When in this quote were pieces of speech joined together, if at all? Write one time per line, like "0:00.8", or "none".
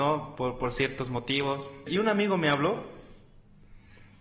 0:01.9